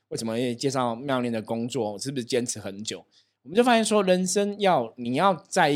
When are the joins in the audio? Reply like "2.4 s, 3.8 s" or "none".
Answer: none